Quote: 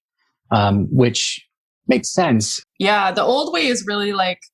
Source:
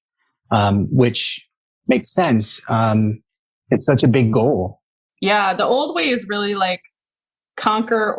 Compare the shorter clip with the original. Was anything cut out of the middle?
yes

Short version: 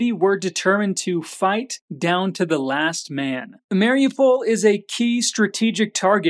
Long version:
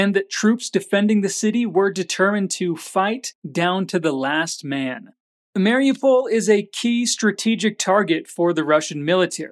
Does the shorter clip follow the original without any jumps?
no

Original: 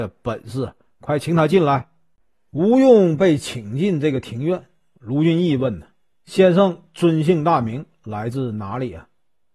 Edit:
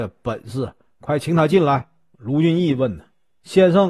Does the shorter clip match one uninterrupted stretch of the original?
no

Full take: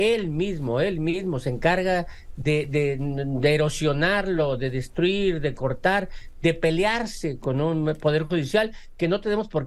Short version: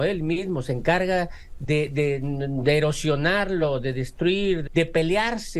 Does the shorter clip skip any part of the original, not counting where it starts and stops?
yes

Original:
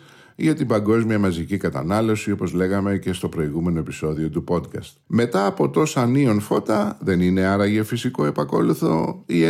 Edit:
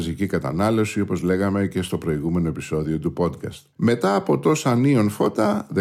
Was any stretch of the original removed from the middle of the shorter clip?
no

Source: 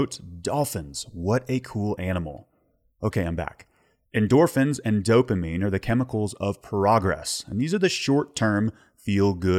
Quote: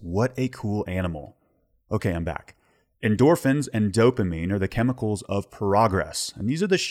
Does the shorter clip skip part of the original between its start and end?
no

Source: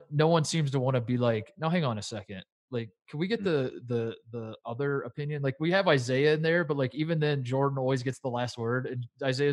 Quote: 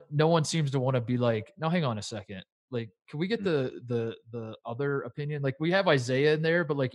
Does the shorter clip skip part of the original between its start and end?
no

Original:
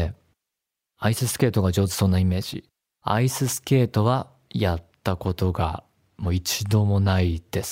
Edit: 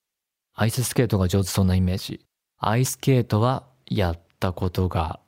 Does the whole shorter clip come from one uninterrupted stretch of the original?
no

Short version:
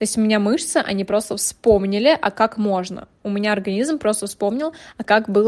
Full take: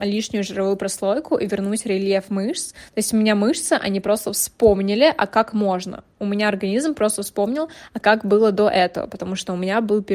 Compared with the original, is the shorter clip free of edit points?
yes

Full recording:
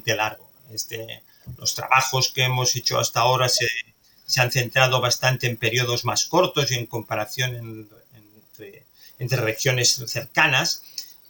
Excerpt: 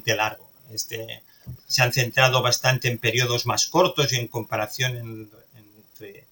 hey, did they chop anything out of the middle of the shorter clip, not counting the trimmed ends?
yes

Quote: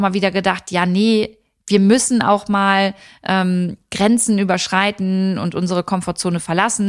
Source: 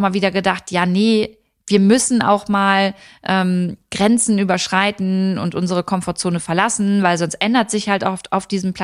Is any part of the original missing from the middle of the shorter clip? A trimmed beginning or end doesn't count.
no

